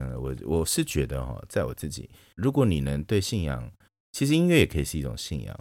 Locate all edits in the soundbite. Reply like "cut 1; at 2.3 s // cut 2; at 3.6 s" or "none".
cut 1; at 2.4 s

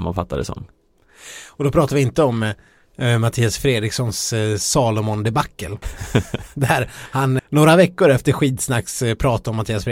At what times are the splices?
cut 1; at 5.8 s // cut 2; at 7.4 s

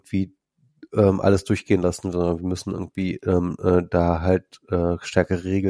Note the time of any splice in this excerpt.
none

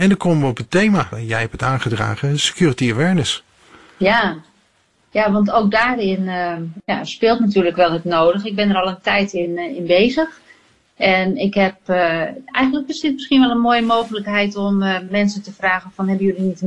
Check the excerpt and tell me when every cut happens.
none

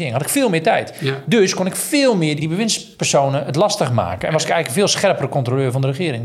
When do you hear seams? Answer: cut 1; at 2.4 s

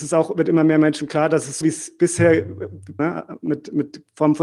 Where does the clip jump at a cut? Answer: cut 1; at 1.6 s // cut 2; at 3.0 s

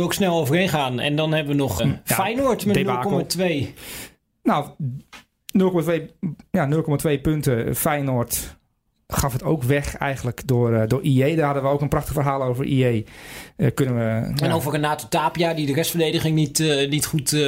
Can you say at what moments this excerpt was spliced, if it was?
cut 1; at 1.8 s

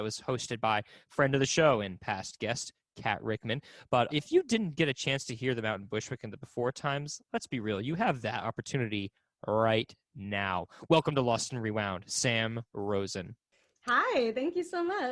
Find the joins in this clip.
cut 1; at 4.1 s

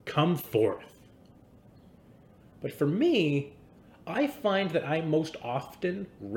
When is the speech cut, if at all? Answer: cut 1; at 2.4 s

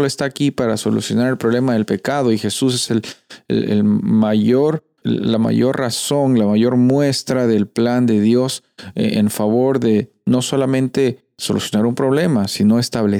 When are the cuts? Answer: cut 1; at 5.0 s

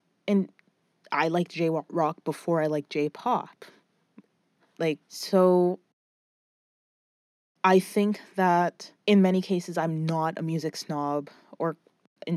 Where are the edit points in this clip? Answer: cut 1; at 5.0 s // cut 2; at 9.0 s

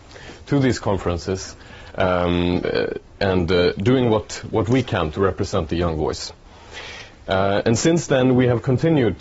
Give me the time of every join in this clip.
cut 1; at 7.2 s

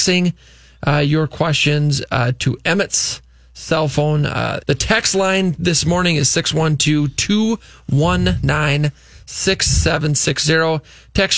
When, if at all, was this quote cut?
cut 1; at 4.6 s

